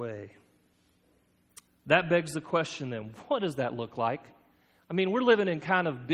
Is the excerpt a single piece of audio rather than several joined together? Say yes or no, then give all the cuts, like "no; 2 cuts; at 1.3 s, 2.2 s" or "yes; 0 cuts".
no; 1 cut; at 1.7 s